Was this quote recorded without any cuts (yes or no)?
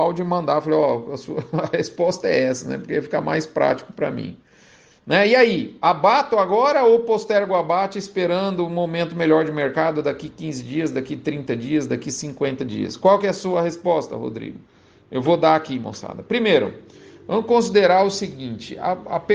yes